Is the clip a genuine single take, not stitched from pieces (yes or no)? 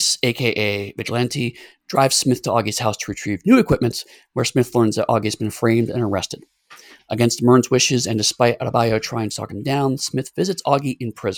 yes